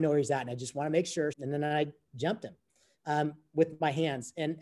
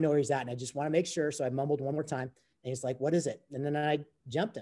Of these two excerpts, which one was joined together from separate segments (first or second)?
first